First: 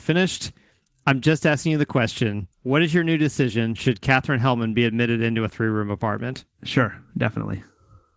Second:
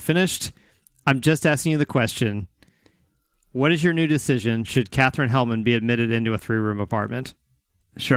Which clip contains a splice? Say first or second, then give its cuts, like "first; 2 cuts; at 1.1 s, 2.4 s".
first; 2 cuts; at 2.5 s, 6.5 s